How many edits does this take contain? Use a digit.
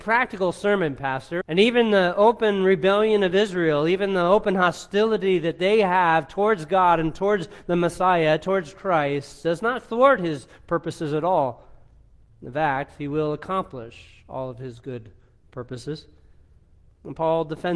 1